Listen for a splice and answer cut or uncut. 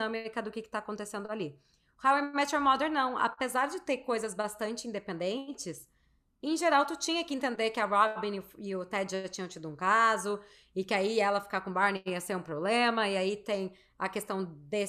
uncut